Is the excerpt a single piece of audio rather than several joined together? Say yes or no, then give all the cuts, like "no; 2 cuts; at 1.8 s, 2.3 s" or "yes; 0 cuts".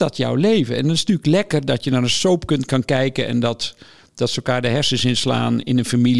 yes; 0 cuts